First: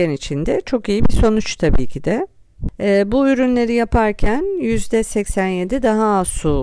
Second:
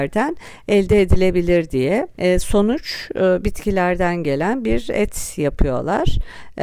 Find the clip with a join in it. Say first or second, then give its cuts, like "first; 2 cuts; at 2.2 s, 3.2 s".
second; 1 cut; at 2.1 s